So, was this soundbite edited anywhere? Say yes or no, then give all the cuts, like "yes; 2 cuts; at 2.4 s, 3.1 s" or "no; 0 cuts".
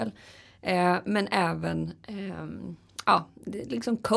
no; 0 cuts